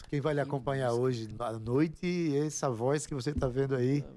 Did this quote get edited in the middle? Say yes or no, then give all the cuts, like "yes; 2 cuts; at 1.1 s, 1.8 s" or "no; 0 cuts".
yes; 1 cut; at 1.3 s